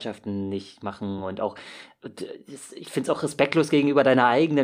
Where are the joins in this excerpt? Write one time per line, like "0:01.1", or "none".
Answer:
none